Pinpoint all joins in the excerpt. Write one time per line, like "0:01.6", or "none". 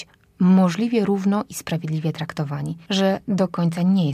0:02.9

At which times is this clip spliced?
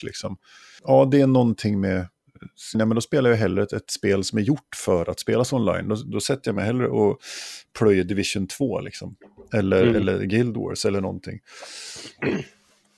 0:02.7

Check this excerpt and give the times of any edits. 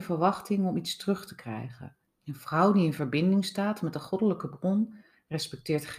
0:02.0

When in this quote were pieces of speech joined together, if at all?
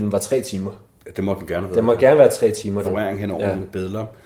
0:02.8

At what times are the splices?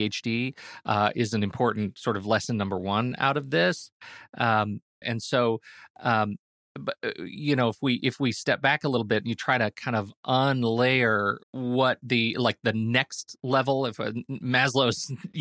0:05.0
0:11.4

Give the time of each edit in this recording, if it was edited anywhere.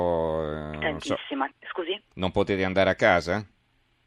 0:01.5

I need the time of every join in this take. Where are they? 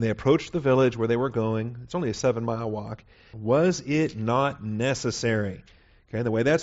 0:03.3

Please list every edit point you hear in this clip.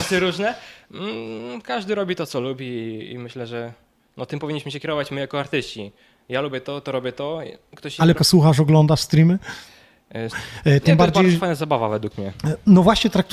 0:08.2
0:10.3

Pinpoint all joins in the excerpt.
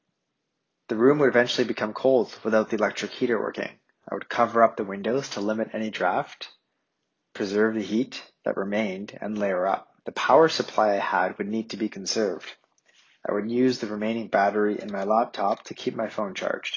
0:10.0

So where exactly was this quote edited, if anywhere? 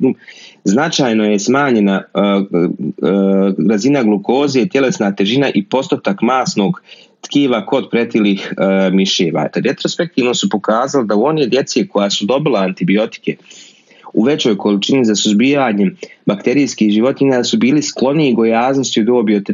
0:09.5

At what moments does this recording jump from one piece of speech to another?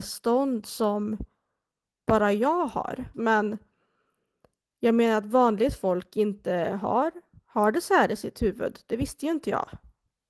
0:03.1

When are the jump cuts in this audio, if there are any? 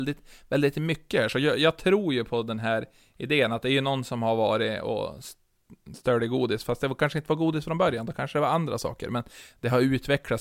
none

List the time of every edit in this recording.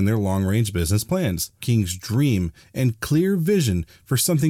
0:01.6

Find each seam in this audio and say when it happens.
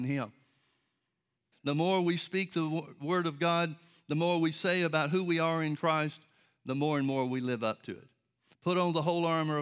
0:01.5
0:08.5

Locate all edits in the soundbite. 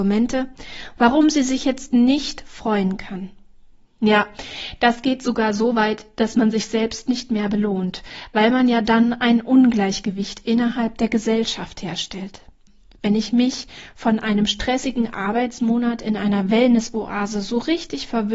0:03.9

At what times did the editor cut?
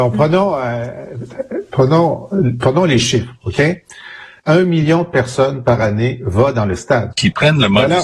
0:04.4
0:07.1

